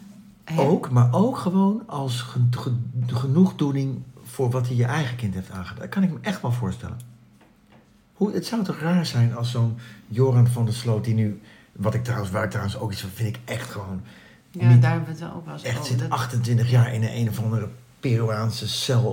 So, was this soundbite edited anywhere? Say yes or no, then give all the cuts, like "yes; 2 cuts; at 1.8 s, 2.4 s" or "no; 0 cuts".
no; 0 cuts